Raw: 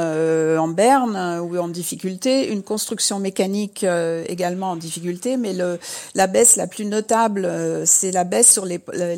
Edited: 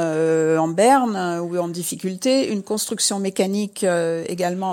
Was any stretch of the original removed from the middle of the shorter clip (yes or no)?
no